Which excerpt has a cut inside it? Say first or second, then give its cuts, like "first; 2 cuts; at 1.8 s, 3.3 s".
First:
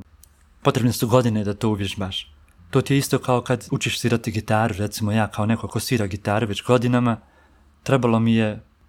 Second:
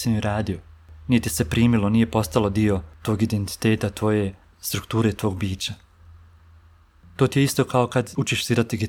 first; 1 cut; at 2.6 s